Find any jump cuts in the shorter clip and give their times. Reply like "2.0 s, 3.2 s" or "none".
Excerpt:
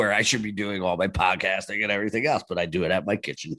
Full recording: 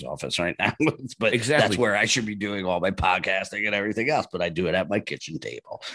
none